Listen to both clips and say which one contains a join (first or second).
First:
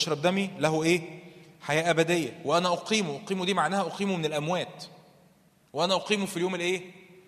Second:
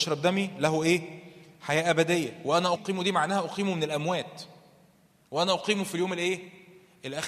second